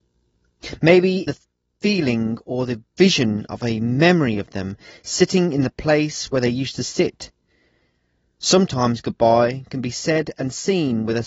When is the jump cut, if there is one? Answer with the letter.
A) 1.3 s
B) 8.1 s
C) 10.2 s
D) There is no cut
A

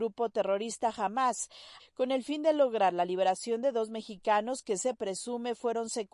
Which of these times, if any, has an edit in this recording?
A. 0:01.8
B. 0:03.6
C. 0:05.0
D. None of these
A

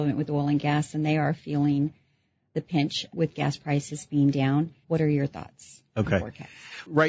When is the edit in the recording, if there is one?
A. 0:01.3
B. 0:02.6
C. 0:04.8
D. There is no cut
C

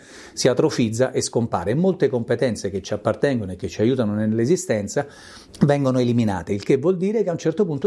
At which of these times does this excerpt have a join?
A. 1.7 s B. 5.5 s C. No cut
B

